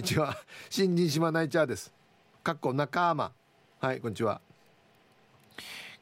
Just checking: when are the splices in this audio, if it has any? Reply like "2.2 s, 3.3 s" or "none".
none